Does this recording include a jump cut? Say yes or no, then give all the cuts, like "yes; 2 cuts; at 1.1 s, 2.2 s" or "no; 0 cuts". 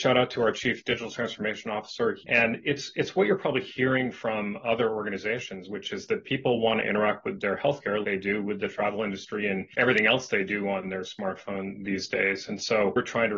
yes; 2 cuts; at 2.2 s, 8.0 s